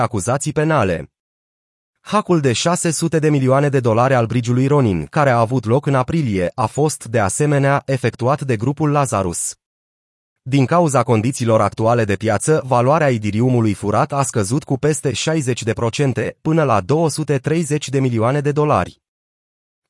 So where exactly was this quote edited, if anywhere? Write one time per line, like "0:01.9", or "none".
none